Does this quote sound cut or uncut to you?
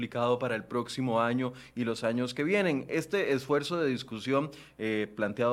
uncut